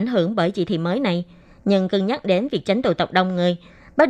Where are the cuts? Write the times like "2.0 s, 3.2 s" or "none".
none